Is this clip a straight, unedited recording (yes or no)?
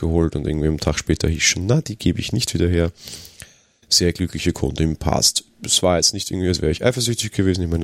yes